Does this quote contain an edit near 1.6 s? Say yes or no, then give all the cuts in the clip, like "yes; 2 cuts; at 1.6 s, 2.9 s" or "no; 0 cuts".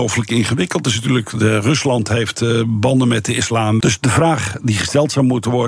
no; 1 cut; at 3.8 s